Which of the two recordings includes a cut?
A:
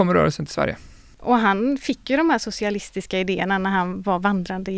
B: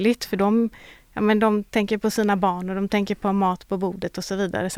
A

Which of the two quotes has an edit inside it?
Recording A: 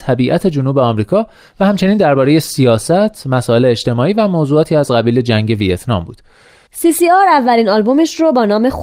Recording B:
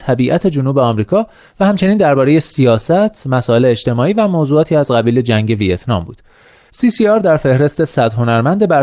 A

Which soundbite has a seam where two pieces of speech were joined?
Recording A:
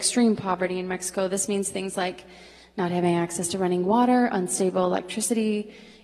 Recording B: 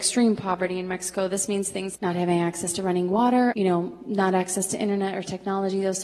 B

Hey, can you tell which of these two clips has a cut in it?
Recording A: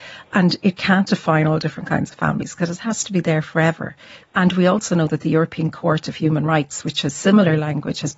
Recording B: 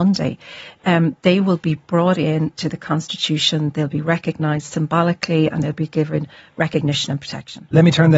A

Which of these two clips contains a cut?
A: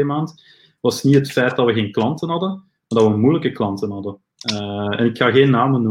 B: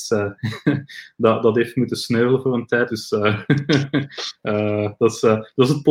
B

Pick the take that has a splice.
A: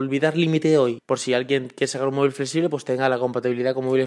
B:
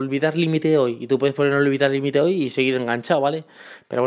A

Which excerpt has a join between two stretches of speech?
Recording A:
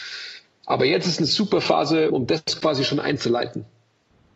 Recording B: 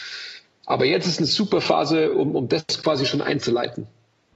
A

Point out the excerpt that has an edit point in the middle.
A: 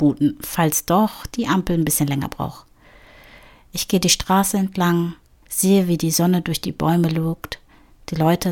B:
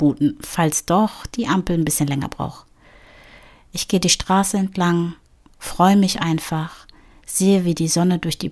A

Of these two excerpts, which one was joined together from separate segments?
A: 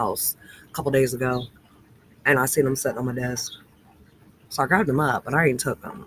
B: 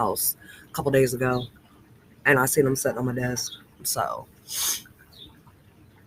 B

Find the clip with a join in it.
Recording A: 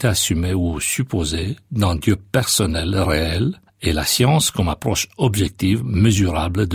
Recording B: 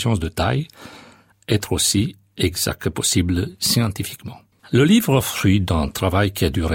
B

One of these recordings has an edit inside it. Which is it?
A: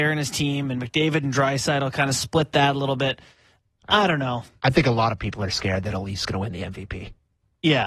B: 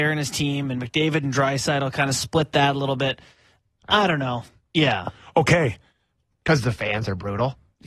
B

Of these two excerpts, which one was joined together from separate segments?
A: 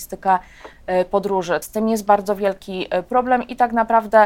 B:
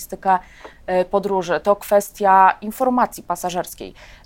A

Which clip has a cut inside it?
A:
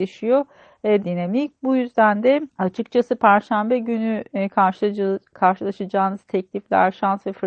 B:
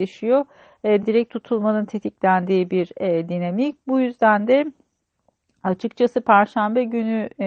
A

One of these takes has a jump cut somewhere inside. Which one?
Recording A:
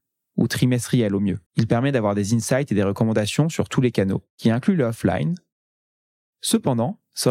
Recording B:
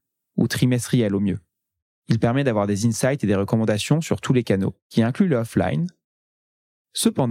A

